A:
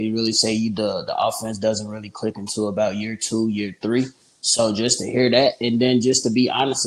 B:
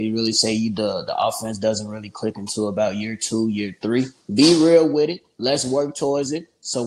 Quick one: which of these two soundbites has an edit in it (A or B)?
B